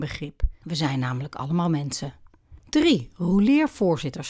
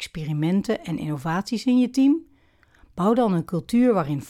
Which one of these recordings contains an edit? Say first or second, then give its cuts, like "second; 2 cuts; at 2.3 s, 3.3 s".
first; 1 cut; at 2.6 s